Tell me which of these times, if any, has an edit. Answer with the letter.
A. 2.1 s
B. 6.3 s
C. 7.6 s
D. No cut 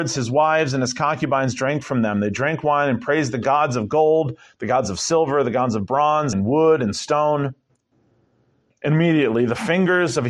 B